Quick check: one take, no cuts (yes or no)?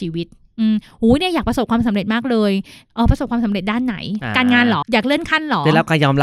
no